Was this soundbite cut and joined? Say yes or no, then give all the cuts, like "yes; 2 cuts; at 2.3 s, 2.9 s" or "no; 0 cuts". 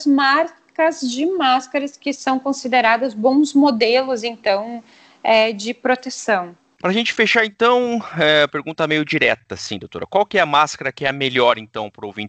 no; 0 cuts